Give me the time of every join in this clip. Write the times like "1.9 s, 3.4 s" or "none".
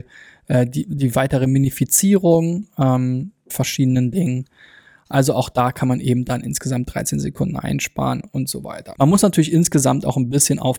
3.5 s, 8.9 s